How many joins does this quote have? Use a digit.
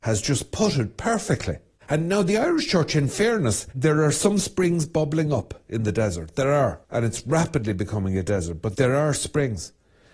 1